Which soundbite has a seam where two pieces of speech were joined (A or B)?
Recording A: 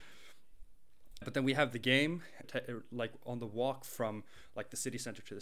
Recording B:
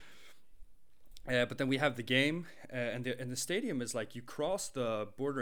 A